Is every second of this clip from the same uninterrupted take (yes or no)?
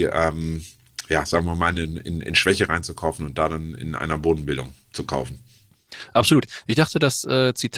yes